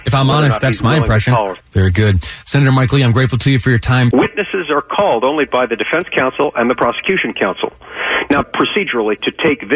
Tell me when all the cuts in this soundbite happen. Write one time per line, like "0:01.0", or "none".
0:01.6
0:04.1
0:08.4